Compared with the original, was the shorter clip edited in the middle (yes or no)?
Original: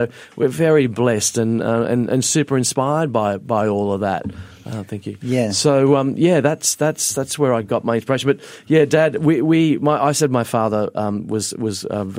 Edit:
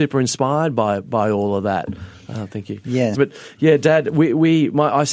yes